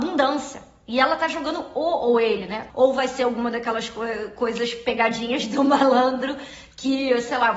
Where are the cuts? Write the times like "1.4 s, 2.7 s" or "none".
2.7 s